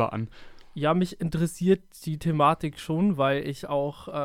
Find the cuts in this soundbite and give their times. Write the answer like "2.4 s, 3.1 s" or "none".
none